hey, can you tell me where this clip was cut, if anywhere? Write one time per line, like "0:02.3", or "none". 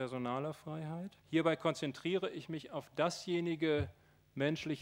0:01.2